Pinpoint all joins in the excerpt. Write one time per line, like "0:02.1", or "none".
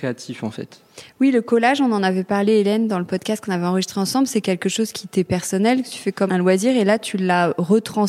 0:06.3